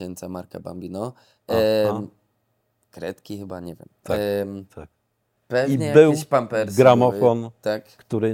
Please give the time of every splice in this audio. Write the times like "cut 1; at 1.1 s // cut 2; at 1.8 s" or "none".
none